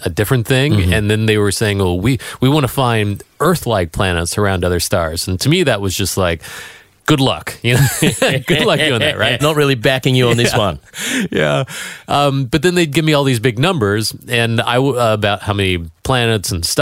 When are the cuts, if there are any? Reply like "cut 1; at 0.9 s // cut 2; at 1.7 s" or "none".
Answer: cut 1; at 9.4 s